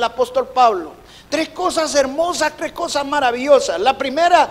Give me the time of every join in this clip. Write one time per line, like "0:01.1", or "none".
none